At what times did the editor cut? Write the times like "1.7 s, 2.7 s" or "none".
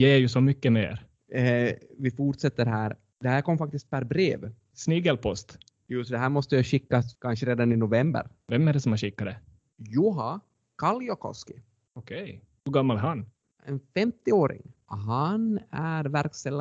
none